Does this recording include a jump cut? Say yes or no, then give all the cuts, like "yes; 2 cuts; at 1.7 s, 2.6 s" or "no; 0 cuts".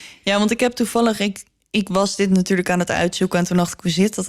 no; 0 cuts